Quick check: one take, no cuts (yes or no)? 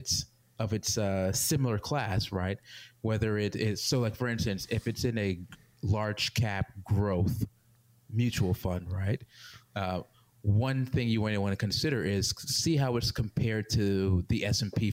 yes